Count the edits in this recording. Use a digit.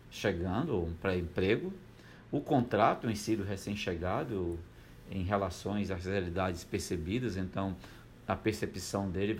0